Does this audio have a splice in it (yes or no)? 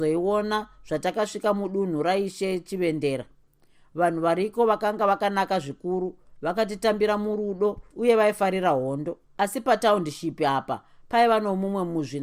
no